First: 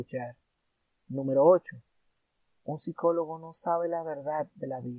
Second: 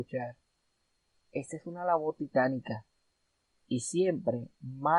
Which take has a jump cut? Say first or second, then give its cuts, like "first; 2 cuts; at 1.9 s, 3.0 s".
first; 1 cut; at 1.0 s